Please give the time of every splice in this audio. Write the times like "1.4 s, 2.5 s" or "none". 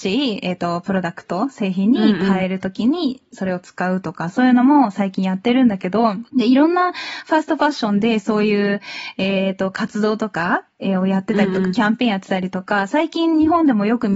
6.3 s